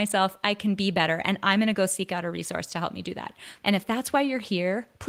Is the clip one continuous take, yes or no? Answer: no